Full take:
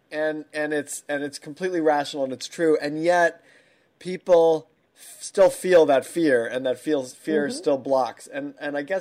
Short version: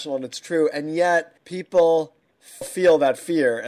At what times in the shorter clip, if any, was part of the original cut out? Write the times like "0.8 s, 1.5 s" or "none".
1.4 s, 2.6 s